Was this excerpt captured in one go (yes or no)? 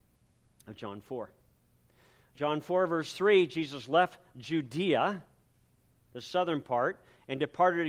yes